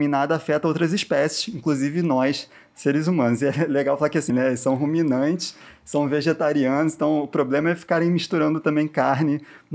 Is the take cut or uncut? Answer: cut